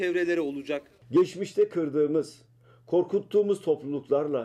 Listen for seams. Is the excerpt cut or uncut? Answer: uncut